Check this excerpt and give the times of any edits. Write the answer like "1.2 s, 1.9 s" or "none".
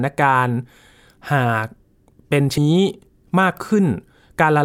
2.6 s